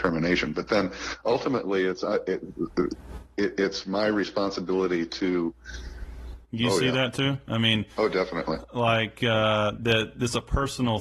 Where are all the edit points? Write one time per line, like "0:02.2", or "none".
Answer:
0:06.4
0:09.8